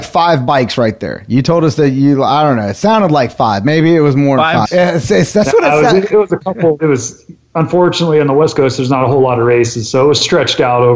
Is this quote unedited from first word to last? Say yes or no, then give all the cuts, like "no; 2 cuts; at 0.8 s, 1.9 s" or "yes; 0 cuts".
no; 2 cuts; at 4.7 s, 6.8 s